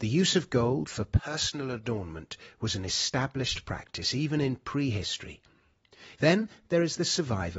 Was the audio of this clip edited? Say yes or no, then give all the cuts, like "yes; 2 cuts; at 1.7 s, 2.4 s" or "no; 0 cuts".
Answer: yes; 1 cut; at 6.1 s